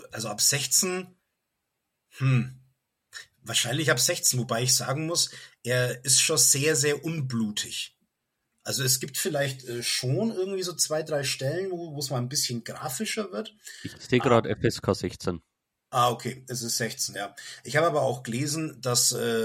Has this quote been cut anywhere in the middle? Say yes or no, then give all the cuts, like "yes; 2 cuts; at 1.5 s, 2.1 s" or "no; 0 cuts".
no; 0 cuts